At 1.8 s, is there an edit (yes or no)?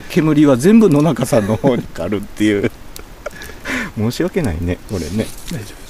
yes